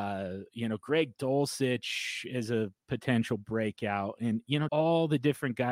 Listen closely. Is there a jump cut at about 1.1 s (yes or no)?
no